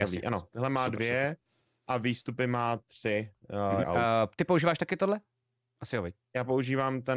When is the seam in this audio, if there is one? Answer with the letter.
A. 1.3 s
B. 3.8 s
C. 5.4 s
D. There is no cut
B